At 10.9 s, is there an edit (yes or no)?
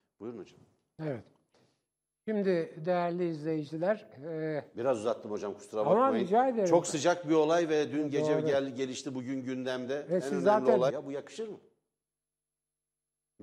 yes